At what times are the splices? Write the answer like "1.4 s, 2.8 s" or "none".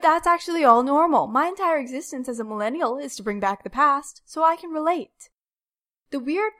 none